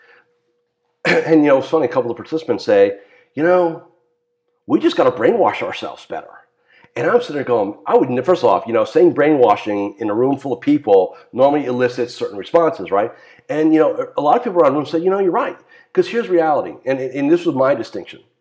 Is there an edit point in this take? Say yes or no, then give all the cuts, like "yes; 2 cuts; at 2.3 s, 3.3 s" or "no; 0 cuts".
no; 0 cuts